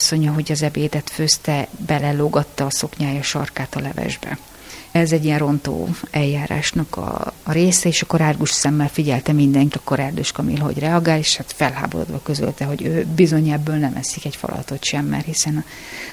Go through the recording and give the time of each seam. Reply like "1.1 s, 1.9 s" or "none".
9.7 s